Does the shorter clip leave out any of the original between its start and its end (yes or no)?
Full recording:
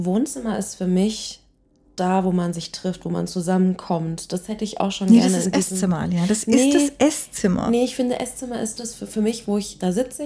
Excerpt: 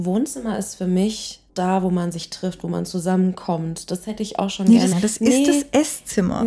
yes